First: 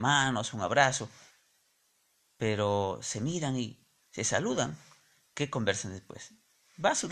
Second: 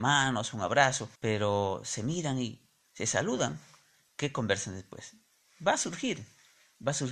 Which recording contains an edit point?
second; 1 cut; at 1.1 s

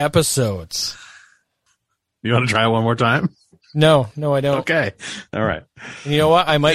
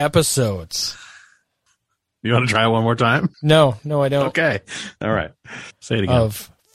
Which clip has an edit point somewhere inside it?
second; 2 cuts; at 3.3 s, 5.7 s

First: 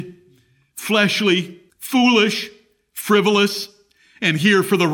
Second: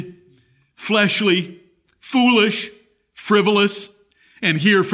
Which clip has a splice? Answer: first; 1 cut; at 1.7 s

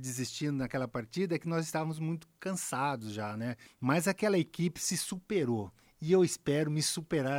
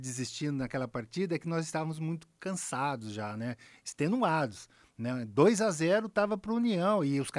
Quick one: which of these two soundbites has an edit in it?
first; 1 cut; at 3.7 s

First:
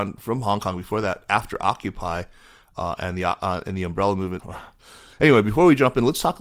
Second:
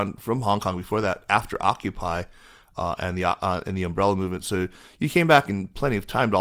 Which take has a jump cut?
first; 1 cut; at 4.4 s

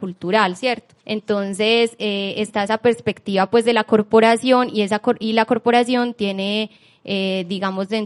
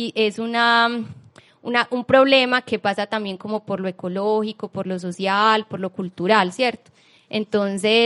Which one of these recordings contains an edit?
first; 1 cut; at 1.0 s

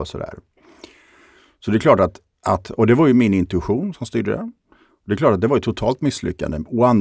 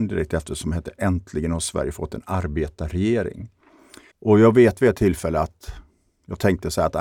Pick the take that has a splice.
second; 1 cut; at 4.1 s

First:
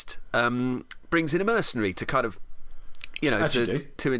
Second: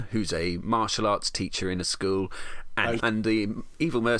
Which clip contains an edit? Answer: second; 1 cut; at 3.0 s

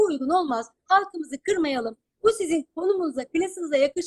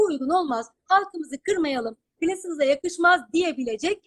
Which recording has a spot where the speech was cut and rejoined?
second; 1 cut; at 2.2 s

